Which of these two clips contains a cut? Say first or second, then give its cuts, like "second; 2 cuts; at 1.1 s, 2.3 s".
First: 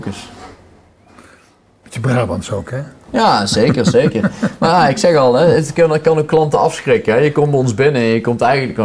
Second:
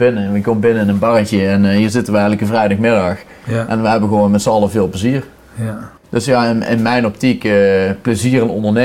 second; 1 cut; at 6.0 s